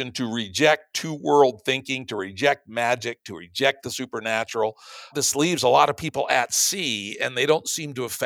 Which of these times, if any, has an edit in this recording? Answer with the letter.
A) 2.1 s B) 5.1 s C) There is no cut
B